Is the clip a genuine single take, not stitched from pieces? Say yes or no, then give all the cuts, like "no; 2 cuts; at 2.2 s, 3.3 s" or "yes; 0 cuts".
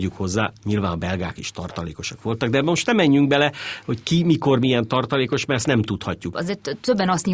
no; 1 cut; at 6.3 s